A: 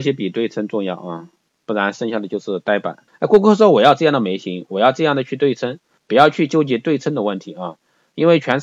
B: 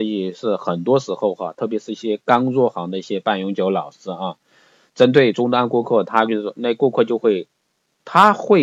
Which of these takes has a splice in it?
A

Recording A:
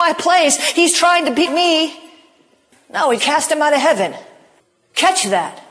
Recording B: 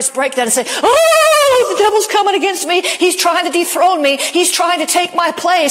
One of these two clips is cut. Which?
A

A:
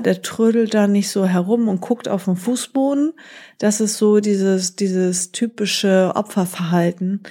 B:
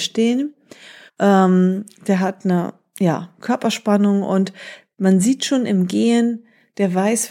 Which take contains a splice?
B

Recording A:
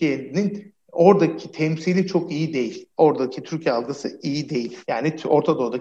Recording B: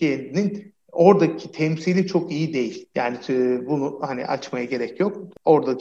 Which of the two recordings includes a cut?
A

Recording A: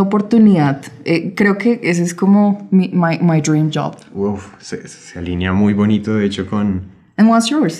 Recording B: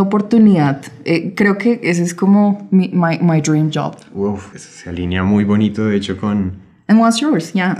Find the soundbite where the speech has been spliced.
B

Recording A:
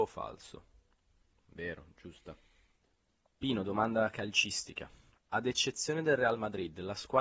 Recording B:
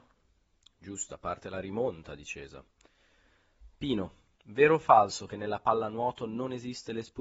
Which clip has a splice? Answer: A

